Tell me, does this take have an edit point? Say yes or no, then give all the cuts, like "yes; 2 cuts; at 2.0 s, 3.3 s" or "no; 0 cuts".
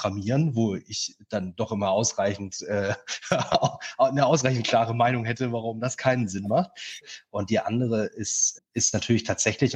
yes; 2 cuts; at 7.0 s, 8.6 s